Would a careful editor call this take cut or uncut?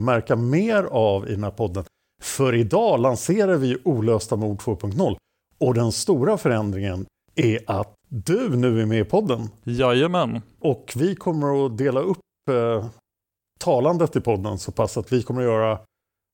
uncut